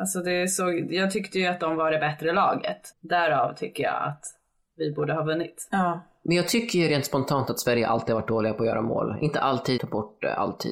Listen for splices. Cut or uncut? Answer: cut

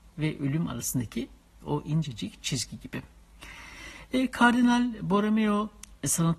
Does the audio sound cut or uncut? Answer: uncut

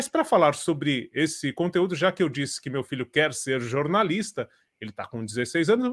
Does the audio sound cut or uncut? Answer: uncut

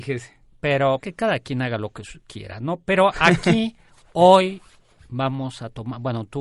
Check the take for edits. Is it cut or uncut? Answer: cut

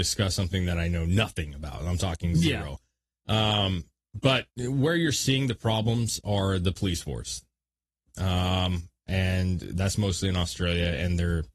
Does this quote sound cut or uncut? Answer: cut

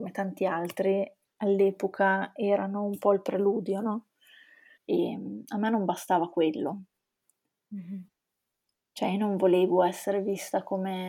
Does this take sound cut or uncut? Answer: cut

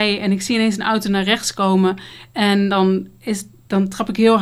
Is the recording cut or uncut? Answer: uncut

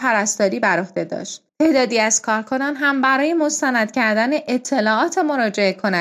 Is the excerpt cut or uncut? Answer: cut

